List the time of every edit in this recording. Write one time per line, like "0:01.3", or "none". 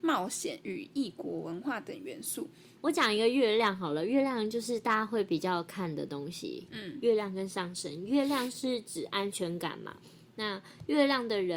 0:02.8